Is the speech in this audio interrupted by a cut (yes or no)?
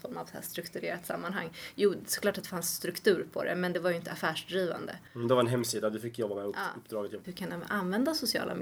yes